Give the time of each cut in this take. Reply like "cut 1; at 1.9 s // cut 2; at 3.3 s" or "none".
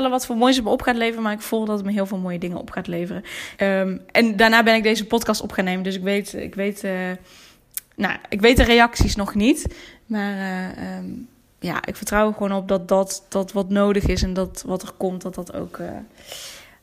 cut 1; at 3.6 s